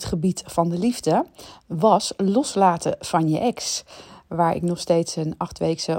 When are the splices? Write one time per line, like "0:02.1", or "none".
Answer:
none